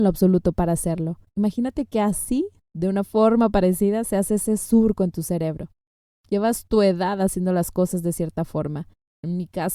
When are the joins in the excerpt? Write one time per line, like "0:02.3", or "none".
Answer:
0:01.3